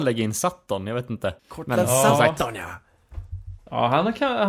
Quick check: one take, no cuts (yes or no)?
no